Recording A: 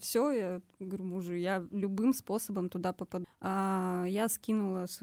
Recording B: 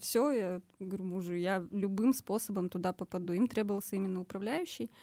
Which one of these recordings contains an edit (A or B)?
A